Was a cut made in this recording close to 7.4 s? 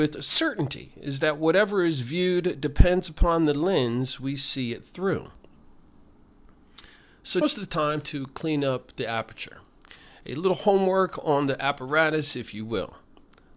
yes; 1 cut; at 7.4 s

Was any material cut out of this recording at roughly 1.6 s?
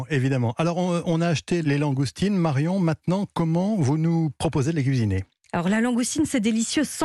yes; 1 cut; at 1.6 s

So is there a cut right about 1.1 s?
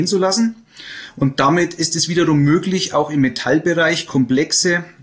no; 0 cuts

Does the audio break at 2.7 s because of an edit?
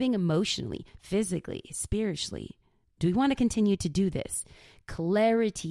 no; 0 cuts

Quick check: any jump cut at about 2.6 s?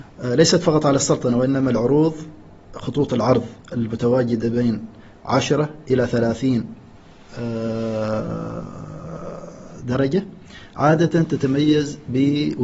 yes; 1 cut; at 2.6 s

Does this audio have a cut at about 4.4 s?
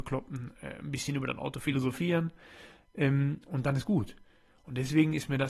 no; 0 cuts

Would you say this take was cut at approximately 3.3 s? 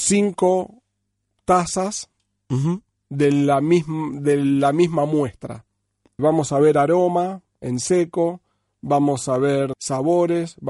no; 2 cuts; at 6.2 s, 9.7 s

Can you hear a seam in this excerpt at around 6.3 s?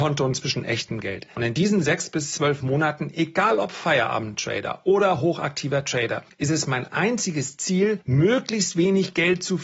no; 1 cut; at 1.3 s

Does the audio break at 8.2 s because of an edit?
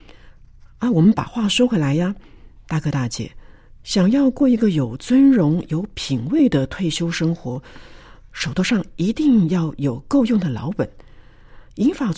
no; 0 cuts

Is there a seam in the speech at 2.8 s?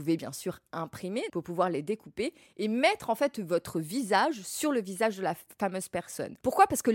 no; 1 cut; at 1.3 s

